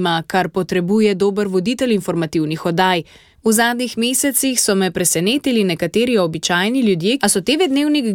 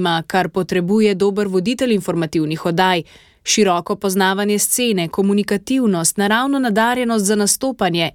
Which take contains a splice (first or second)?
first